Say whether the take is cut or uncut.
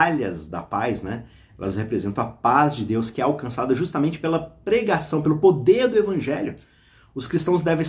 uncut